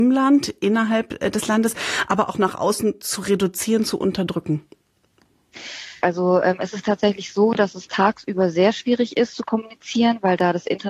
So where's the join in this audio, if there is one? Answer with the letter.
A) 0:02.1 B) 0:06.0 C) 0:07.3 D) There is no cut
B